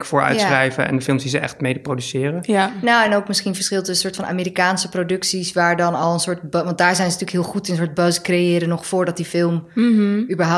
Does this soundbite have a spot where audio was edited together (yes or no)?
no